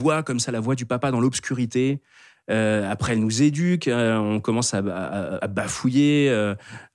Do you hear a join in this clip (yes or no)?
yes